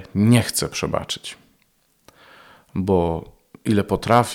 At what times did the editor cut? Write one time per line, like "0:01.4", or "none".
none